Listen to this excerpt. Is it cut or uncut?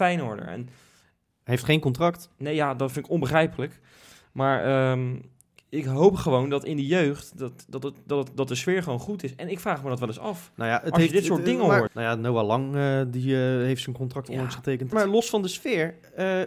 cut